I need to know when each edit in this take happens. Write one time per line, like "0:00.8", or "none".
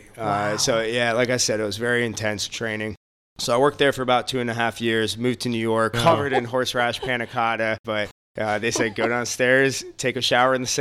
0:05.9
0:07.8